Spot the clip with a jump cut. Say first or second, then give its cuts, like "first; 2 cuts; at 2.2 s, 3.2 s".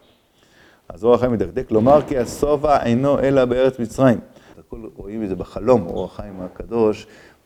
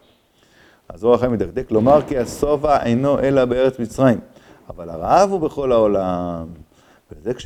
first; 1 cut; at 4.5 s